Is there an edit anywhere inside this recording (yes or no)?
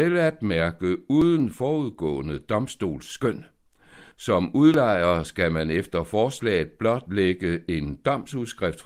no